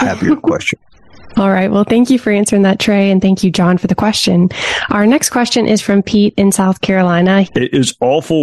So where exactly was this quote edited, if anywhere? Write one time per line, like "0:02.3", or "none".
0:07.4